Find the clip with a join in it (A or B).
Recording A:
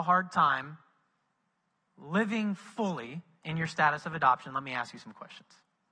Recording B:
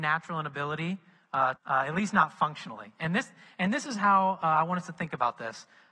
B